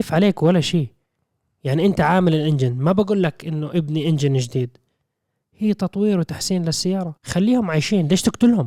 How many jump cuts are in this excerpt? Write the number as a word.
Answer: one